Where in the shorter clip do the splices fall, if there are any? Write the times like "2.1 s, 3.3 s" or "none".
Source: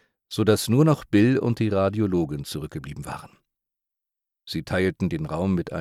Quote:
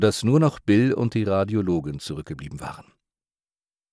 none